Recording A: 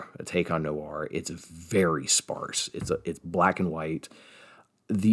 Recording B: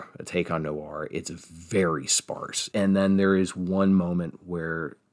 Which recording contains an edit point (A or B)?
B